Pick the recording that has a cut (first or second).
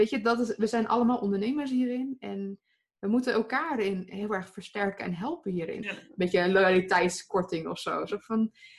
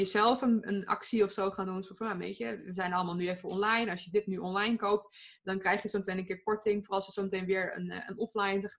first